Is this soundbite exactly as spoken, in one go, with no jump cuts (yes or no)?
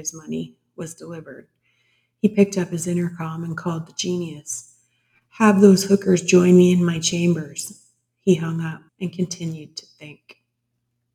no